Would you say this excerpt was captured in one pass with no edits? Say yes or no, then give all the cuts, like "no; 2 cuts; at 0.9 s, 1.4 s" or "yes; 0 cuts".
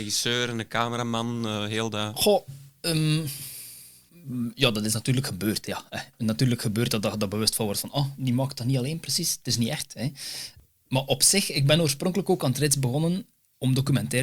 yes; 0 cuts